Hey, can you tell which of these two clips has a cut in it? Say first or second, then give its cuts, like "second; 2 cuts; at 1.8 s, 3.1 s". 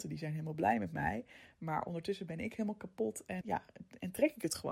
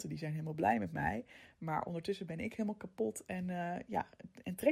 first; 1 cut; at 3.4 s